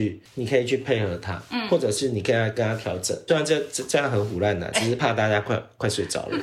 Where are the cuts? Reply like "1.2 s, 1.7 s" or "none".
3.3 s, 4.7 s